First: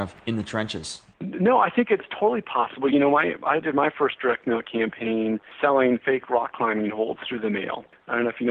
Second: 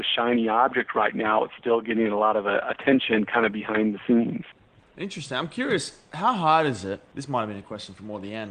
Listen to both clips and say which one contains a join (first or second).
second